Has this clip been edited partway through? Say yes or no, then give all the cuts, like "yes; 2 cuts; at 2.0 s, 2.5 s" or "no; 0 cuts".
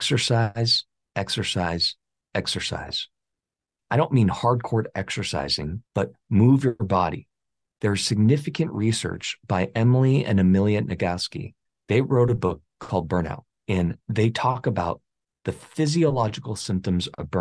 yes; 1 cut; at 5.9 s